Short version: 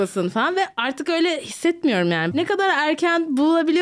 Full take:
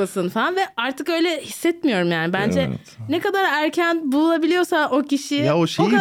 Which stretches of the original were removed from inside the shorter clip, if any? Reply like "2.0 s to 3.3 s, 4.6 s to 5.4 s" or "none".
2.3 s to 3.1 s